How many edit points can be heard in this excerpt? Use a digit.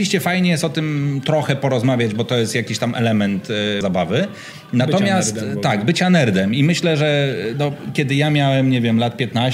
1